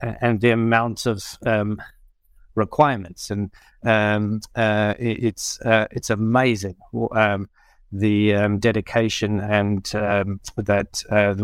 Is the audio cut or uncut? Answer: cut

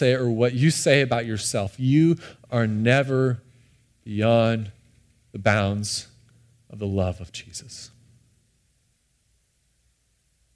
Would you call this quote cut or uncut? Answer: uncut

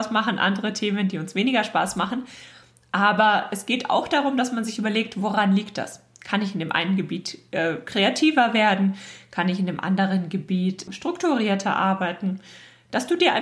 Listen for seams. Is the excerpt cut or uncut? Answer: cut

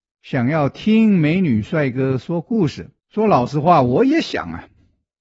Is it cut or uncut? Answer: cut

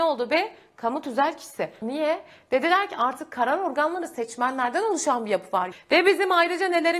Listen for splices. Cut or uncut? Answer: cut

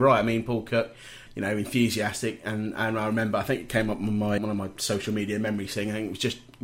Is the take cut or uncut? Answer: cut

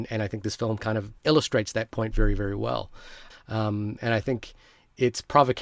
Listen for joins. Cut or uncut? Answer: cut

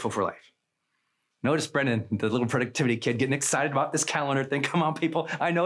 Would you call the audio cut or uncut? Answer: cut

